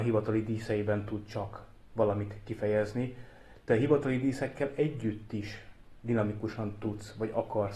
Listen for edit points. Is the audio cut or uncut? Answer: uncut